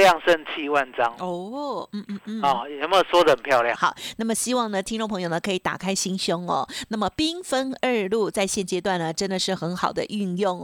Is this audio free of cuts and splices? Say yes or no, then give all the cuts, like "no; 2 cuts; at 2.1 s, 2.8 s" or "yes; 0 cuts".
no; 1 cut; at 3.8 s